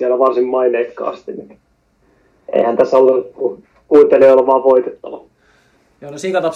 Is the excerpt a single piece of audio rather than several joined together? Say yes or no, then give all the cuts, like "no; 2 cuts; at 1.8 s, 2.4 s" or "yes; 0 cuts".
yes; 0 cuts